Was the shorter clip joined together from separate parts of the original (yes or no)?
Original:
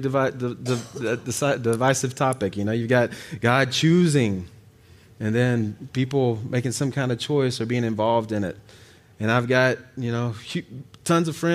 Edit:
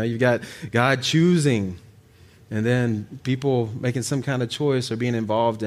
no